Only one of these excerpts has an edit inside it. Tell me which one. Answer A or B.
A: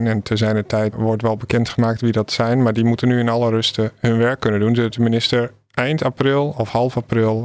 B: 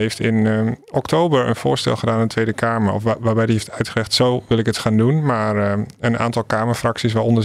A